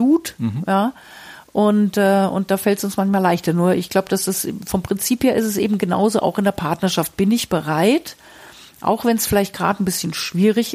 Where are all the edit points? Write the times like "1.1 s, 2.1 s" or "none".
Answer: none